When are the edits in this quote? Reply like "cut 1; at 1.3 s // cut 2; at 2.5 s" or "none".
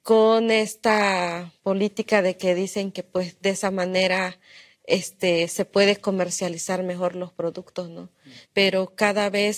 cut 1; at 8.4 s

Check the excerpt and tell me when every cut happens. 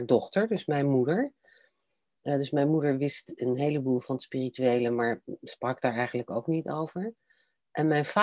none

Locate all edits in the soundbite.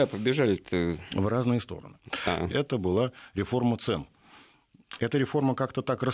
cut 1; at 2.5 s

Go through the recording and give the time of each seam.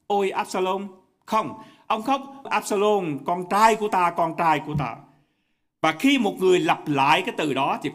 cut 1; at 2.5 s

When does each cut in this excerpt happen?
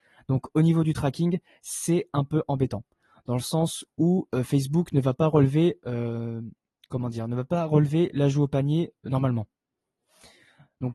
none

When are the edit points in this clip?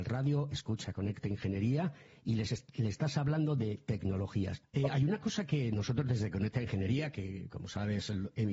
cut 1; at 4.6 s

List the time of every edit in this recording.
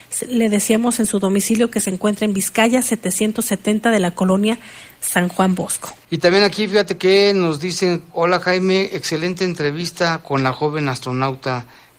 cut 1; at 6.0 s

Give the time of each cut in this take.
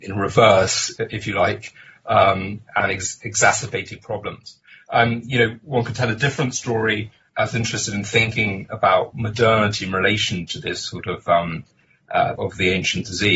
cut 1; at 7.3 s // cut 2; at 12.4 s

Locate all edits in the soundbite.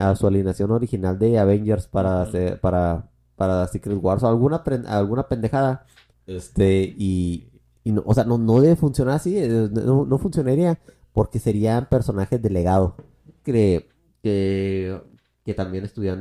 cut 1; at 6.1 s // cut 2; at 13.4 s

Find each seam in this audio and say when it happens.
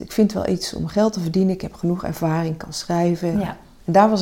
cut 1; at 3.3 s

